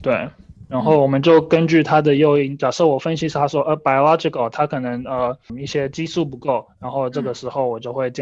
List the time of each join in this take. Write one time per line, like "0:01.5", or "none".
none